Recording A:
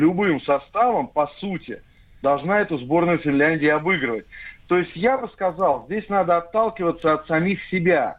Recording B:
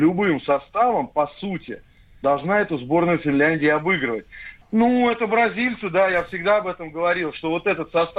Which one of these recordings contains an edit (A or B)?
B